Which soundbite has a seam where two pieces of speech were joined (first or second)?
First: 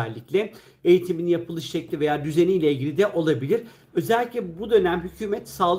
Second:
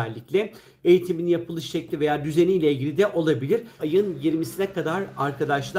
second